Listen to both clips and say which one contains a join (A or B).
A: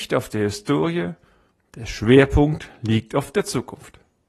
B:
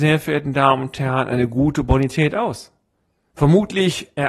B